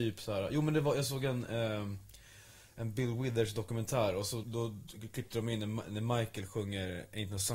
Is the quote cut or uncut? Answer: cut